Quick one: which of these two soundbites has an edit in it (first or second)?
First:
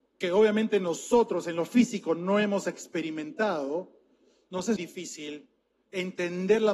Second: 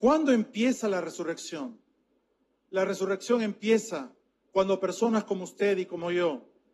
first